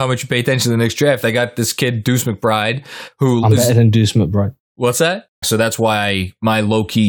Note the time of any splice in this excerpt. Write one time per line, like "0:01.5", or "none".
0:05.4